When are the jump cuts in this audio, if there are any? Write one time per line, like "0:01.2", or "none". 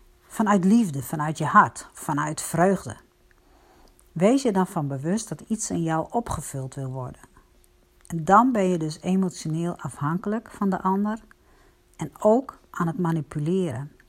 none